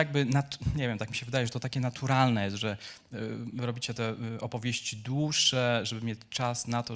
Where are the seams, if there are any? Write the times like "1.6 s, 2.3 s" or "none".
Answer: none